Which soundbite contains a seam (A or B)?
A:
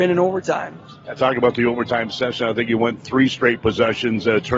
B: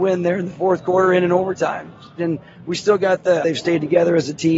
B